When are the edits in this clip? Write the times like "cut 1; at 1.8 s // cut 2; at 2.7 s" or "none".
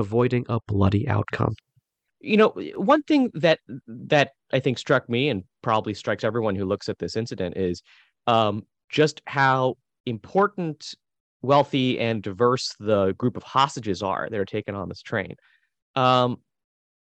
cut 1; at 2.1 s